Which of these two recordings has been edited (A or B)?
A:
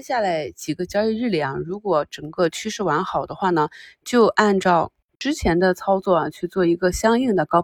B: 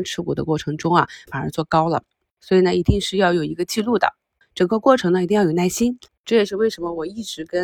B